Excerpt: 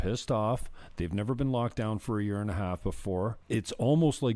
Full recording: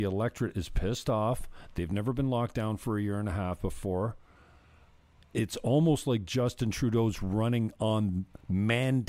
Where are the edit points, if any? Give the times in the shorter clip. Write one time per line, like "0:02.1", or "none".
0:03.4